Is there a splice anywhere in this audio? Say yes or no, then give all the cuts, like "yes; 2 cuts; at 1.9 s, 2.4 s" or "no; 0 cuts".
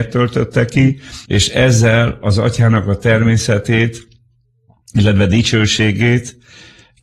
yes; 1 cut; at 1.3 s